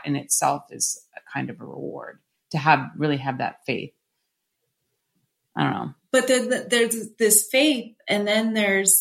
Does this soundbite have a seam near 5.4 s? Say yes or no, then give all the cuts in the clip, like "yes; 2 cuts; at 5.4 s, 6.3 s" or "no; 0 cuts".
no; 0 cuts